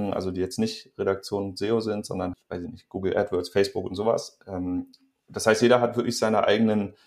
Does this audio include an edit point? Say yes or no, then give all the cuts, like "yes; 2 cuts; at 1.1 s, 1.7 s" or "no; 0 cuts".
yes; 1 cut; at 2.3 s